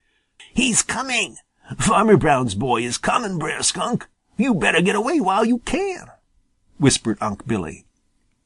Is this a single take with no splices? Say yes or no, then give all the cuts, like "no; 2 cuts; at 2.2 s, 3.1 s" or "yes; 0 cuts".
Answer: yes; 0 cuts